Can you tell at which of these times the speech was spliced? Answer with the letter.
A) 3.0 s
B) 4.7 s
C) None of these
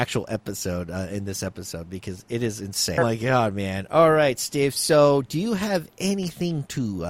A